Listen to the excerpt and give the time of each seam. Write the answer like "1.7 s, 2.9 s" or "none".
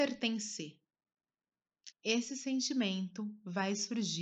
1.9 s